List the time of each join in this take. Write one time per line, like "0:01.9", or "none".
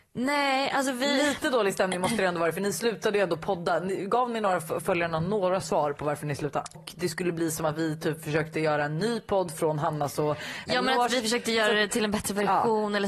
0:06.7

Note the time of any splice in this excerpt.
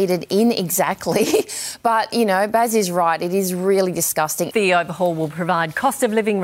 0:04.5

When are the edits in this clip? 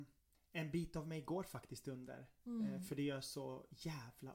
none

